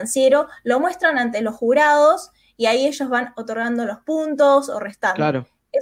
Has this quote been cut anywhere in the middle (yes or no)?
no